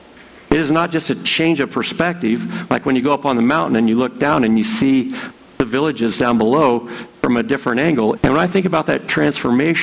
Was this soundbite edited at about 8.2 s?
yes; 1 cut; at 8.2 s

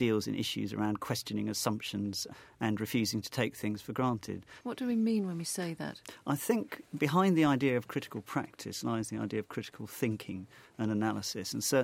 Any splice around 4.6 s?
yes; 1 cut; at 4.6 s

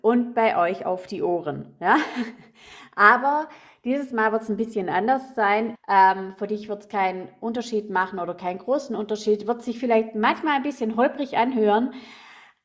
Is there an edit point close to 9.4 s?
no; 1 cut; at 5.7 s

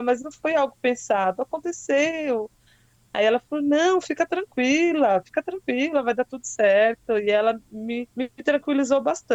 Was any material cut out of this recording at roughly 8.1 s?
yes; 1 cut; at 8.1 s

